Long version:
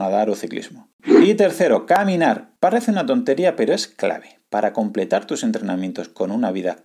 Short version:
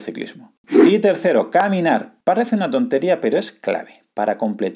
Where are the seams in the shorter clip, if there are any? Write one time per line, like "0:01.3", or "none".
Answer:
none